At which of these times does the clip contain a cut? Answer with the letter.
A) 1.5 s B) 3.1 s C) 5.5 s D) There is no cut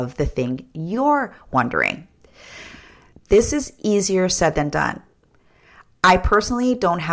B